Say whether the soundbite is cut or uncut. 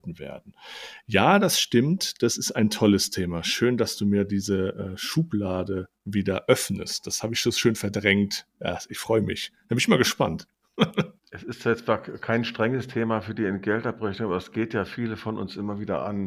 uncut